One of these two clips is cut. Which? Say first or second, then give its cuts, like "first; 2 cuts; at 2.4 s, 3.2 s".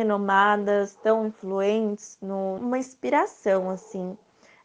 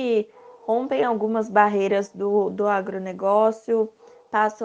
first; 1 cut; at 2.6 s